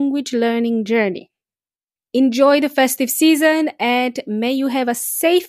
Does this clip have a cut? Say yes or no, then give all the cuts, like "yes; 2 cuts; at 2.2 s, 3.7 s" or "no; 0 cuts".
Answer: yes; 1 cut; at 2.0 s